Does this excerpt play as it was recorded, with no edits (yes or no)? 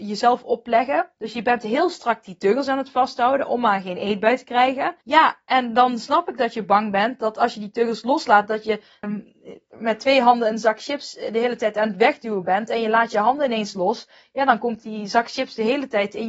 no